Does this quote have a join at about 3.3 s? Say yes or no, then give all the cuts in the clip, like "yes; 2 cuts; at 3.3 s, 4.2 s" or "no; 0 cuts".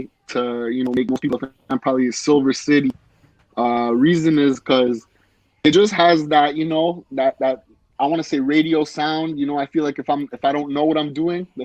no; 0 cuts